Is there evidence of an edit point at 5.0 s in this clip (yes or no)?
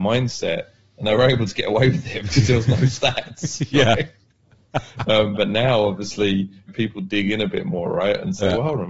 no